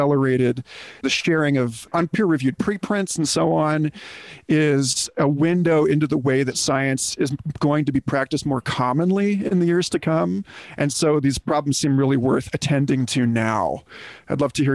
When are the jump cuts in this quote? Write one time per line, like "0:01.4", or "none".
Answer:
none